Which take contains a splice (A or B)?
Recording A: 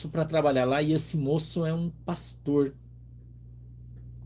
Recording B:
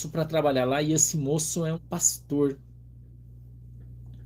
B